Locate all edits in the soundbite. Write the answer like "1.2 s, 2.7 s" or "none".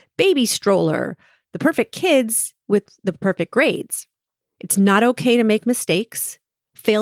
4.4 s